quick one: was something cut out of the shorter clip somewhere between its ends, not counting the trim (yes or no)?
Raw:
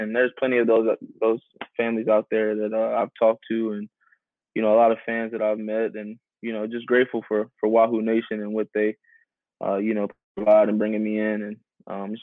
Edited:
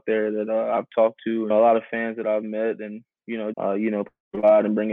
yes